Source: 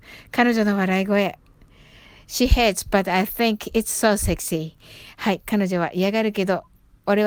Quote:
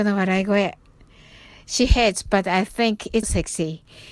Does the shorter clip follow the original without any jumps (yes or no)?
no